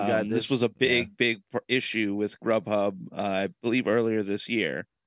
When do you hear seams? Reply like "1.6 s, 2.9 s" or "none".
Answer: none